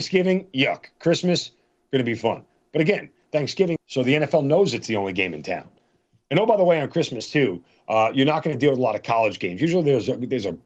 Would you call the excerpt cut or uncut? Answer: cut